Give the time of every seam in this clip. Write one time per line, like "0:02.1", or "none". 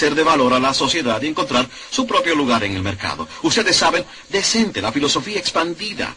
0:04.2